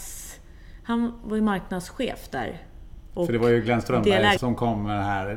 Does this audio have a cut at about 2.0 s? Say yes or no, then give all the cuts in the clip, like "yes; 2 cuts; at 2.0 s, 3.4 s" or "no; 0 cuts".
no; 1 cut; at 4.4 s